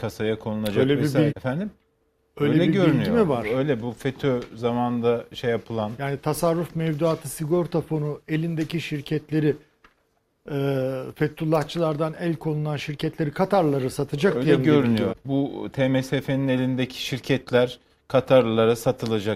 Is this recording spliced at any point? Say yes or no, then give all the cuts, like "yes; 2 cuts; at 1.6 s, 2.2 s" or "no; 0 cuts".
yes; 2 cuts; at 1.3 s, 15.1 s